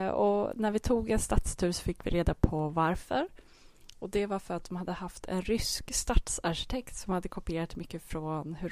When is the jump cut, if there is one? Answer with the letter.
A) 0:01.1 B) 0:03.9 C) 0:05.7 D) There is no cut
D